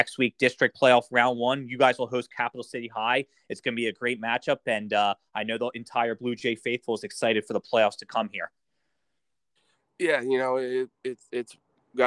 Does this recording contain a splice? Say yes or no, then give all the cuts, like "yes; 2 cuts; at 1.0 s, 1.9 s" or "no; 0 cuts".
no; 0 cuts